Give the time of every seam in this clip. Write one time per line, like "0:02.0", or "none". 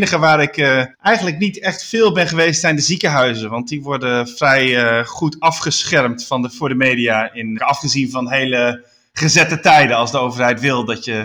0:00.9
0:07.6

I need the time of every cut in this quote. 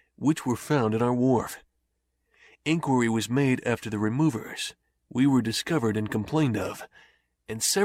none

